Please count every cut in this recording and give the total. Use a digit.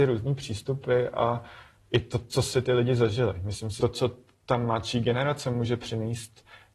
1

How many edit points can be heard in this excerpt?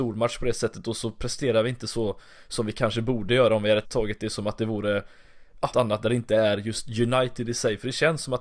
2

